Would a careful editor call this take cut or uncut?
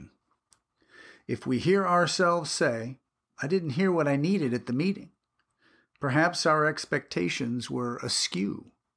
uncut